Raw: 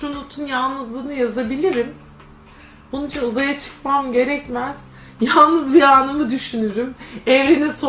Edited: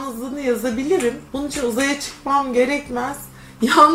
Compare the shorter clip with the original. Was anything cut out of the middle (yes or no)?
yes